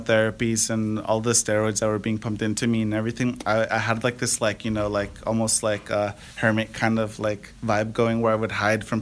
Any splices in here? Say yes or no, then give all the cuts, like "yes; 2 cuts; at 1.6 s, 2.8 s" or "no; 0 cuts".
no; 0 cuts